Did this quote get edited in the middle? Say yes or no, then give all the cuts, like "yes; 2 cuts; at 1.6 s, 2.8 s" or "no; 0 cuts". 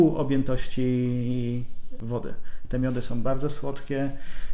no; 0 cuts